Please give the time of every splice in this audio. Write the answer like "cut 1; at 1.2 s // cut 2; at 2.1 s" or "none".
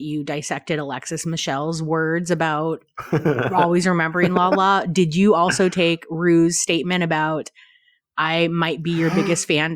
none